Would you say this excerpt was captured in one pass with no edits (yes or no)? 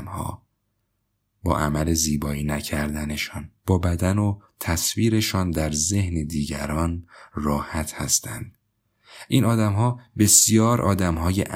no